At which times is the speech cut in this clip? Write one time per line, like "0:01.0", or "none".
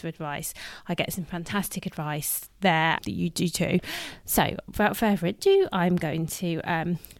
0:03.0